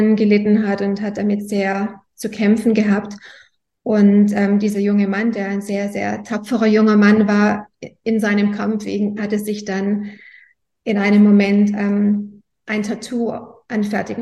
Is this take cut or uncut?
cut